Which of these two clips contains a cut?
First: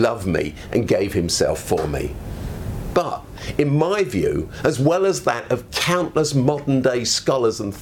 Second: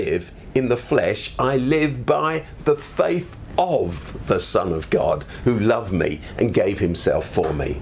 first; 1 cut; at 2.9 s

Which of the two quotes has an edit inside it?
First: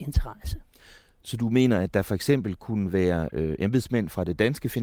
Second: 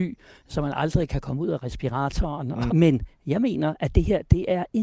second; 1 cut; at 2.7 s

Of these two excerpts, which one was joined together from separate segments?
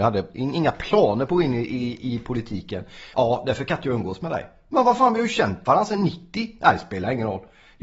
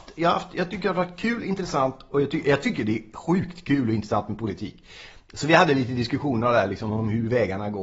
first; 1 cut; at 3.1 s

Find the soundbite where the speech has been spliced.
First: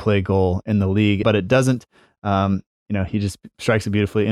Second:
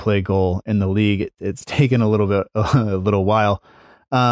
first; 1 cut; at 1.2 s

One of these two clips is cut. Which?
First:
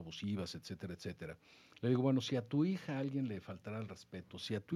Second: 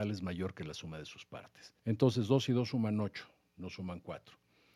second; 1 cut; at 1.8 s

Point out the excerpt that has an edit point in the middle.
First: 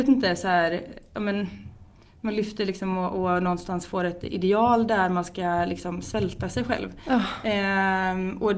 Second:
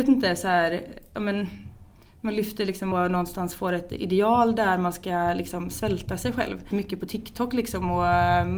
second; 2 cuts; at 2.9 s, 6.7 s

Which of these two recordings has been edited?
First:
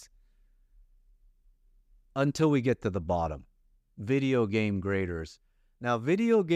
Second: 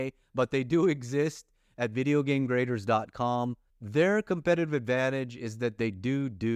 second; 1 cut; at 3.7 s

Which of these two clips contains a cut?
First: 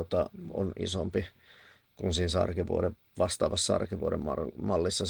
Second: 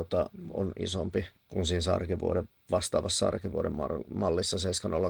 second; 1 cut; at 1.4 s

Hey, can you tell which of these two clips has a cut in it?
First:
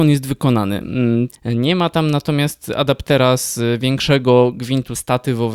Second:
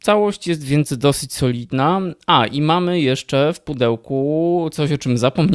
first; 1 cut; at 1.3 s

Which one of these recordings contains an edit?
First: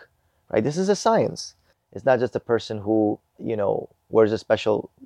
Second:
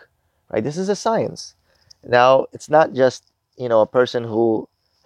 first; 2 cuts; at 1.7 s, 3.4 s

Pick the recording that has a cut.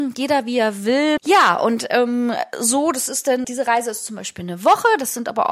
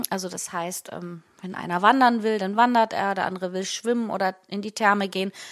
first; 2 cuts; at 1.2 s, 3.4 s

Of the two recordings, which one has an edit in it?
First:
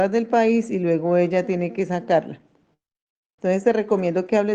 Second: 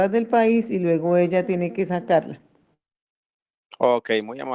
first; 1 cut; at 3.4 s

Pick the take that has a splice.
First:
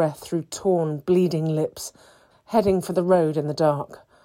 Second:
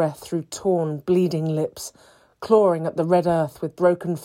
first; 1 cut; at 2.3 s

